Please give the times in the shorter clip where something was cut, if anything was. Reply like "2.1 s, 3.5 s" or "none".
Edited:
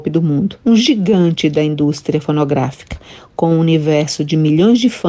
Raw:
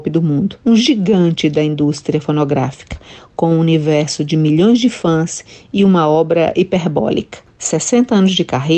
none